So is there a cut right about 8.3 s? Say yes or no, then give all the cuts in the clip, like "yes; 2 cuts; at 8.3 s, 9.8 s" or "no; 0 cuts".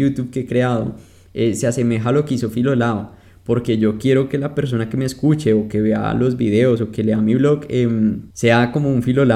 yes; 1 cut; at 8.3 s